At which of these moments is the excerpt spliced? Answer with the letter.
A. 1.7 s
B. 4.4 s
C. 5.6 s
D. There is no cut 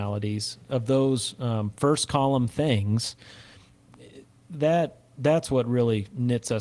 D